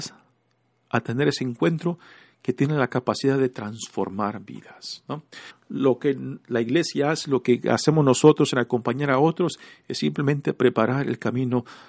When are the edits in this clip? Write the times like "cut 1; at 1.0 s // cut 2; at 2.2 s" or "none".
cut 1; at 5.5 s

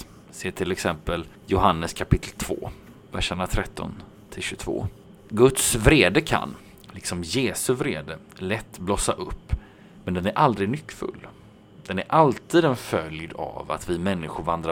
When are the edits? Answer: none

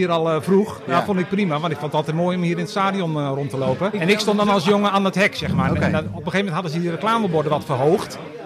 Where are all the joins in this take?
cut 1; at 3.9 s

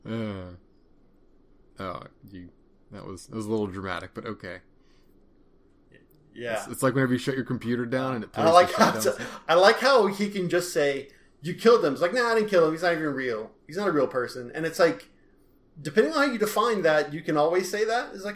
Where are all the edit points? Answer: none

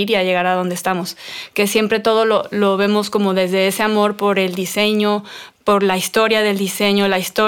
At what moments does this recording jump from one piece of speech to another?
none

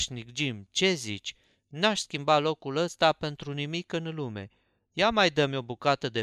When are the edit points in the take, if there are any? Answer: none

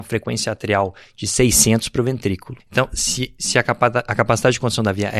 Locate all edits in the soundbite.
cut 1; at 2.6 s

